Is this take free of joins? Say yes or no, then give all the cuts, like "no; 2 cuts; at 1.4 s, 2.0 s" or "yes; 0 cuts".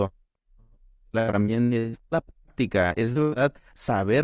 yes; 0 cuts